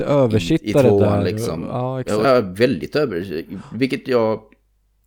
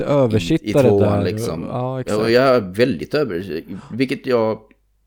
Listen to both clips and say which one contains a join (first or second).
first